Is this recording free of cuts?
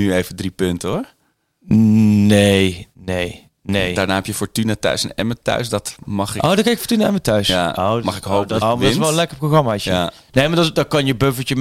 no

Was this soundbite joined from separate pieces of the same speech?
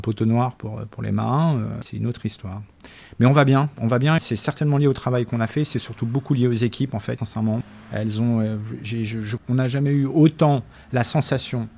yes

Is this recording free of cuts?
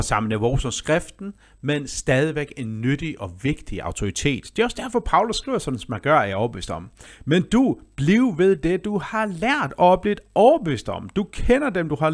yes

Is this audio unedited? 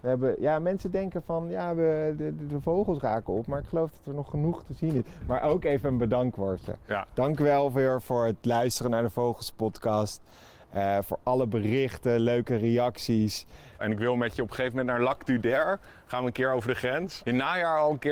no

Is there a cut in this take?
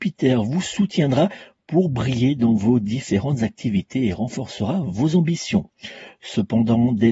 no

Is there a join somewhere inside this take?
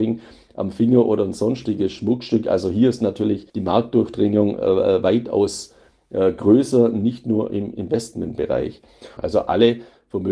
yes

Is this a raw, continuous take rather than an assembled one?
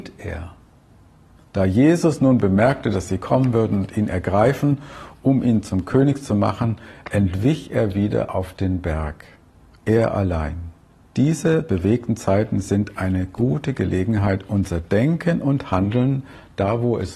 no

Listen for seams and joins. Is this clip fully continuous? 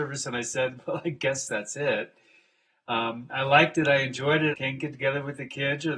no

